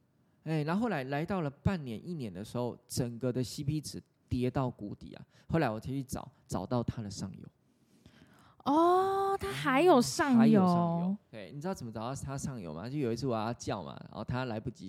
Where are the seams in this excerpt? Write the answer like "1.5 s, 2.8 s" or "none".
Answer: none

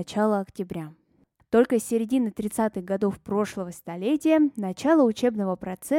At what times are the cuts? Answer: 1.4 s

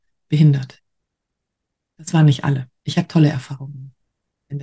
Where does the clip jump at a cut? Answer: 2.8 s

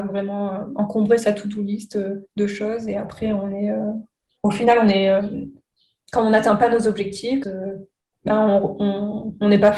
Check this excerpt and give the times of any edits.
7.4 s

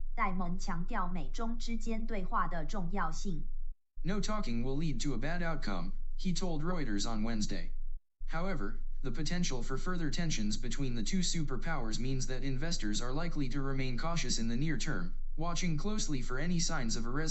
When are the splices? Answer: 4.0 s

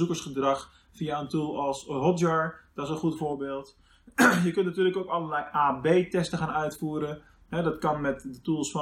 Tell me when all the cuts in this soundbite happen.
none

